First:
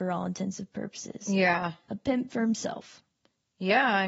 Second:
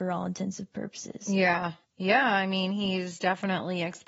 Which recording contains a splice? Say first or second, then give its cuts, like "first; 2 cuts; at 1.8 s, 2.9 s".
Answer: second; 1 cut; at 1.8 s